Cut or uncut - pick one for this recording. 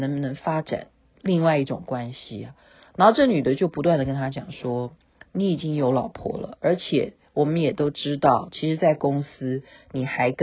uncut